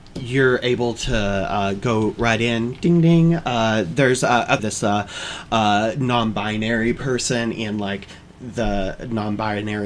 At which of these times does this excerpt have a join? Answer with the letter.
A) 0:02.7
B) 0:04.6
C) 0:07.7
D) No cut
B